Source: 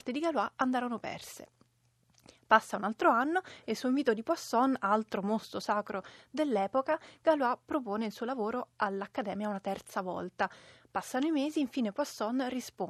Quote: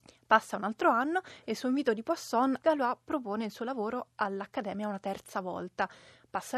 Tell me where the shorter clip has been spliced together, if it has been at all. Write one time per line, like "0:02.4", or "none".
0:02.6